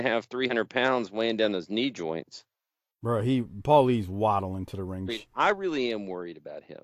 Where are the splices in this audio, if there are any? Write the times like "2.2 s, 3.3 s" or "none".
5.1 s